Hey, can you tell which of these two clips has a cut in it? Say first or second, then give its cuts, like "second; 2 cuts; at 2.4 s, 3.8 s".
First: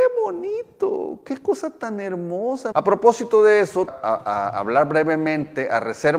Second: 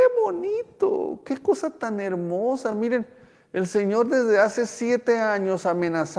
first; 2 cuts; at 2.7 s, 3.9 s